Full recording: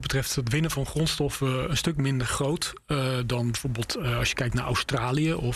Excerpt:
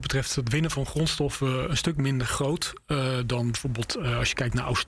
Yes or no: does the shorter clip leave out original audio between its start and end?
no